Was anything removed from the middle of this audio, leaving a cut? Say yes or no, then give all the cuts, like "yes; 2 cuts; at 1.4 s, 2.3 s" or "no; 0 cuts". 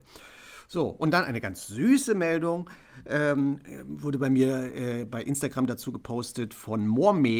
no; 0 cuts